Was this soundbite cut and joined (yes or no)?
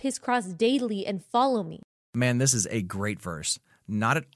no